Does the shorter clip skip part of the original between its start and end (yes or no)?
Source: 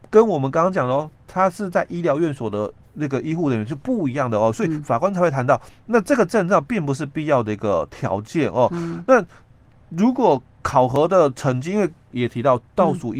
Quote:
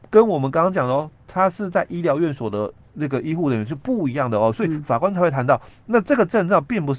no